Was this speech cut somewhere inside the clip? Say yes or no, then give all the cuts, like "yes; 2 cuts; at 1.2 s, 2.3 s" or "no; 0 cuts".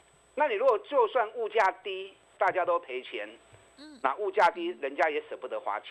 yes; 1 cut; at 2.4 s